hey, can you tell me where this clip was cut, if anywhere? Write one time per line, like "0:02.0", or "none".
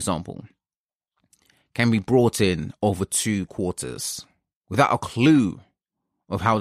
none